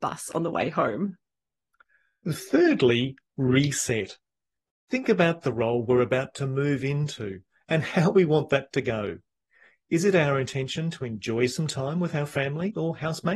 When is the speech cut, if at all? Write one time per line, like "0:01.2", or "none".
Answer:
none